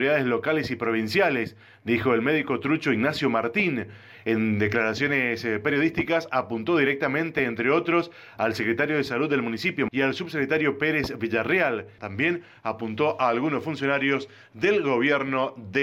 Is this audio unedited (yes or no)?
no